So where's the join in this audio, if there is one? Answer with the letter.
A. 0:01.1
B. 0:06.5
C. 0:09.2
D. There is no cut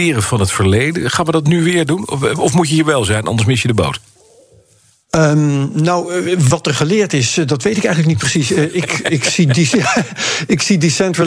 D